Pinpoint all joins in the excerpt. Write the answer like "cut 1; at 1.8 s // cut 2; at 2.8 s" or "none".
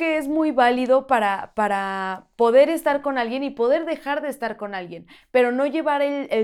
none